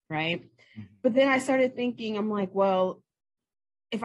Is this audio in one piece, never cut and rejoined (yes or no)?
yes